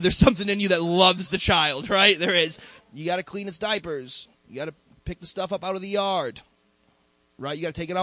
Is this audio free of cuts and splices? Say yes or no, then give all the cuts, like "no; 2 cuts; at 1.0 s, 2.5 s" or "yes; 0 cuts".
no; 1 cut; at 2.8 s